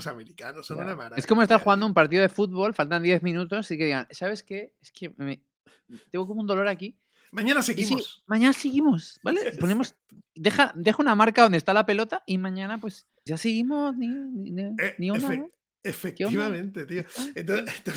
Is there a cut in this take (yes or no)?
yes